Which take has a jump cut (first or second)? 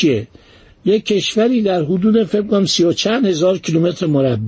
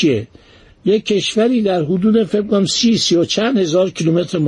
first